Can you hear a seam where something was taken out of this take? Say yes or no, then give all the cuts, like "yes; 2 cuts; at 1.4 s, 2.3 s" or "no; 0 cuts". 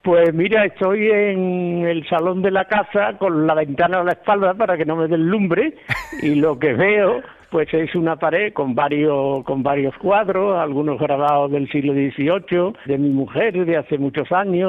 yes; 2 cuts; at 8.5 s, 12.9 s